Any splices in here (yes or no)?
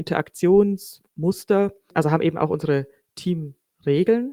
yes